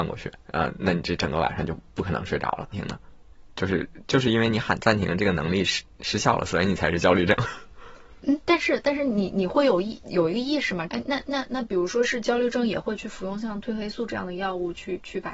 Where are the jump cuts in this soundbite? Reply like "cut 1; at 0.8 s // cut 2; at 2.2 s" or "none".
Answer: cut 1; at 2.7 s // cut 2; at 8.2 s // cut 3; at 10.9 s